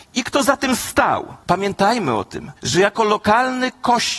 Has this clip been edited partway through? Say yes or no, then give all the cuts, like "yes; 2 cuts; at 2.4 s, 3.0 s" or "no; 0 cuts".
yes; 2 cuts; at 1.4 s, 2.6 s